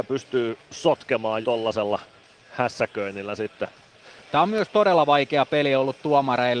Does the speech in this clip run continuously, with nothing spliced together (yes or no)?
no